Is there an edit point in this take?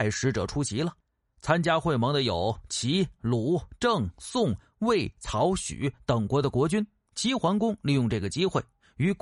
yes; 1 cut; at 7.1 s

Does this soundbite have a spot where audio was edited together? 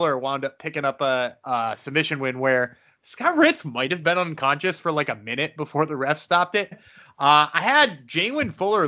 yes; 1 cut; at 6.7 s

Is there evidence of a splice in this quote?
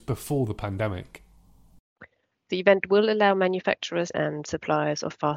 yes; 2 cuts; at 2.3 s, 4.1 s

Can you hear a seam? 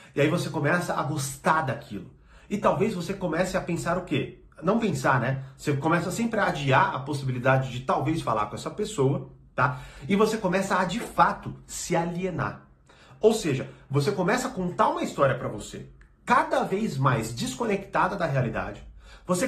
no; 0 cuts

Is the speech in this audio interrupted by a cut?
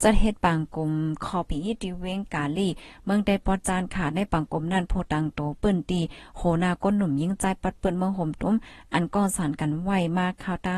yes; 1 cut; at 1.5 s

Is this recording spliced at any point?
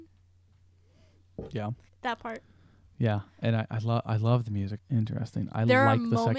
yes; 2 cuts; at 1.9 s, 4.8 s

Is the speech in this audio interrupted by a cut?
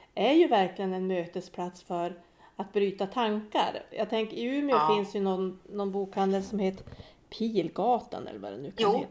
no; 0 cuts

